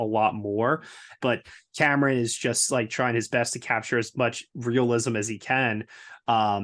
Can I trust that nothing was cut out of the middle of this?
no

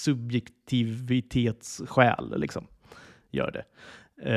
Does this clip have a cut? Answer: no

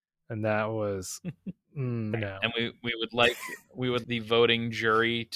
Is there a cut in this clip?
yes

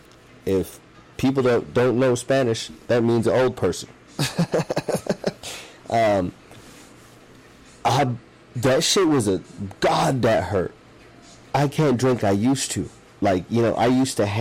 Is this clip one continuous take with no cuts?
no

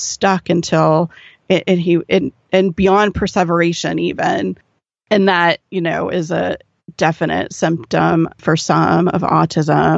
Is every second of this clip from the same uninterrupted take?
yes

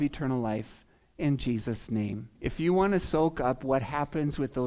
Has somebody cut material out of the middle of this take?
yes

